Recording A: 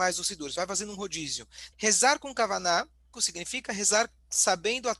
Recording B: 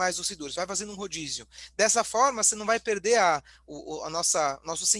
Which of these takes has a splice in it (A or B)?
A